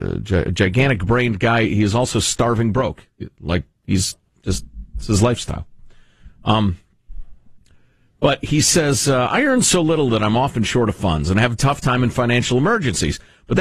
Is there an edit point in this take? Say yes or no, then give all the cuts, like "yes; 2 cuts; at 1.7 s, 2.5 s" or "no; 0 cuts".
no; 0 cuts